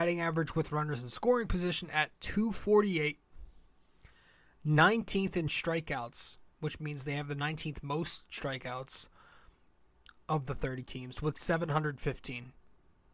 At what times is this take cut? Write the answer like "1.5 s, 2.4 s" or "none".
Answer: none